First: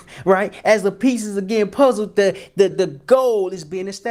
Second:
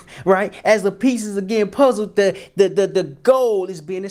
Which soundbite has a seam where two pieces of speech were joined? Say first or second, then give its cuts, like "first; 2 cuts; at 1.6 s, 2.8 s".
first; 1 cut; at 2.7 s